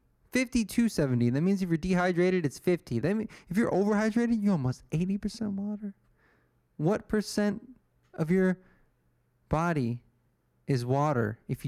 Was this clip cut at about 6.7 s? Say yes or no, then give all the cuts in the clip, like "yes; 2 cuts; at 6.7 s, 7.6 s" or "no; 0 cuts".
no; 1 cut; at 3.0 s